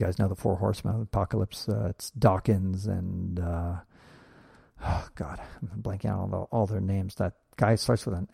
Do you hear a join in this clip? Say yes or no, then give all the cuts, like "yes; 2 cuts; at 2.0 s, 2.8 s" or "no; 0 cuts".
no; 0 cuts